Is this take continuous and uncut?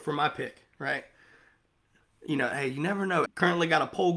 no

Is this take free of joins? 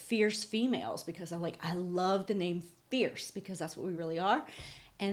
yes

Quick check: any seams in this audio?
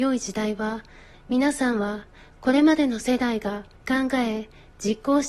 yes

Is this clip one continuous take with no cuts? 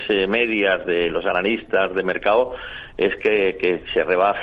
yes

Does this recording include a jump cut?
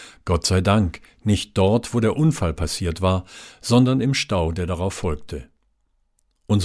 no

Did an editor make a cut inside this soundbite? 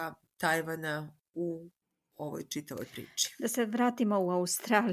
no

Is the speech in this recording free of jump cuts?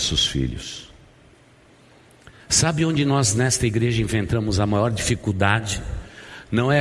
yes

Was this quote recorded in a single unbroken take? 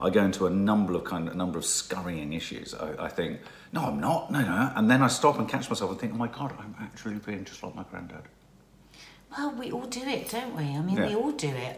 yes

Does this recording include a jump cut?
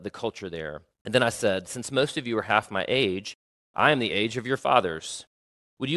yes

